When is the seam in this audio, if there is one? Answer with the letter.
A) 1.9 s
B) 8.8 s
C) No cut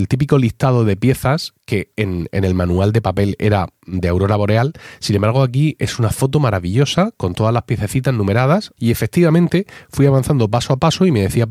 B